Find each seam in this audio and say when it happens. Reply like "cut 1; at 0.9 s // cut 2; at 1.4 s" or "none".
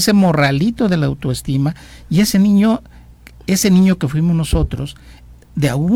cut 1; at 3.4 s